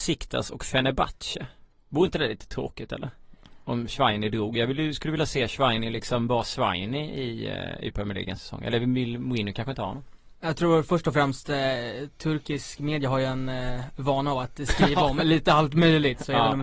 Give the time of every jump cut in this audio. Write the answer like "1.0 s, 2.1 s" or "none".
none